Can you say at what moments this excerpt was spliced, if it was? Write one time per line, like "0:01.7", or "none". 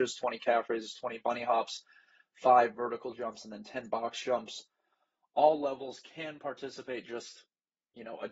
none